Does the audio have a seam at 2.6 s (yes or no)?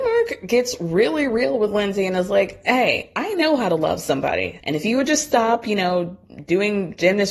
no